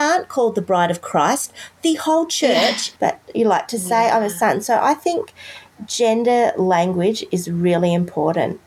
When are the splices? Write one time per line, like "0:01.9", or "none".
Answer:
0:03.0